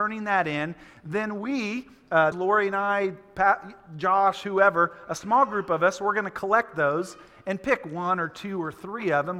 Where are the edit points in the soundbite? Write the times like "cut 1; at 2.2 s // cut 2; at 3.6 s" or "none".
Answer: cut 1; at 2.3 s